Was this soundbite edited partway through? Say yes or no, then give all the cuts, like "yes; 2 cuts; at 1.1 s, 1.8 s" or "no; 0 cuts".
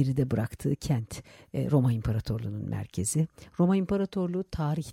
no; 0 cuts